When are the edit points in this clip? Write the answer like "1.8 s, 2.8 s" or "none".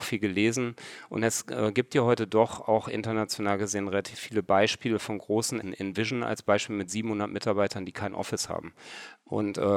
5.6 s